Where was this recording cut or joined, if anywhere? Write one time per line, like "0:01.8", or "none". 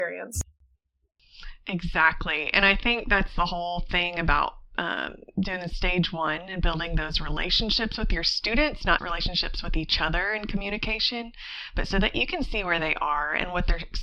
0:09.0